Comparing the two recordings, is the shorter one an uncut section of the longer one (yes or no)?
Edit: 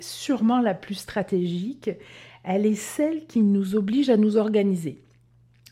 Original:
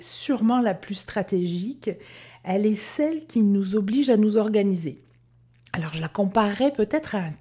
yes